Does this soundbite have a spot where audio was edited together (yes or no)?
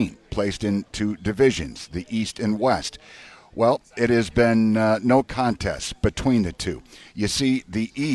no